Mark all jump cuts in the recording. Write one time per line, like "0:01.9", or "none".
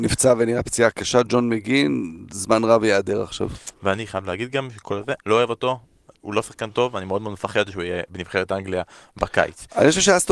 0:05.2